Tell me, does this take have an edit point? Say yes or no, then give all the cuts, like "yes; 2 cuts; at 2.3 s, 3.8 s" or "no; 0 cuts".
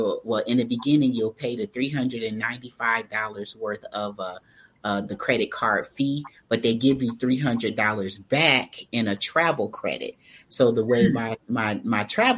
no; 0 cuts